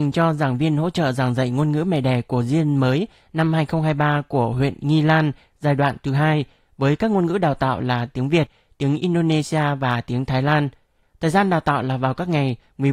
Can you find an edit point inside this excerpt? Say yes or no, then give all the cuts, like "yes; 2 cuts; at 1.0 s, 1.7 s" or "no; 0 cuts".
yes; 1 cut; at 11.0 s